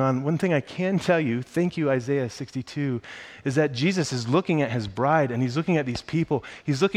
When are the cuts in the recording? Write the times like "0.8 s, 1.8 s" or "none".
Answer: none